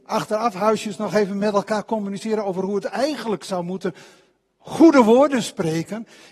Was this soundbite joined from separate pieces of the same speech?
no; 0 cuts

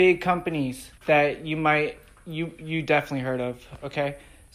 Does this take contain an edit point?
yes; 1 cut; at 1.0 s

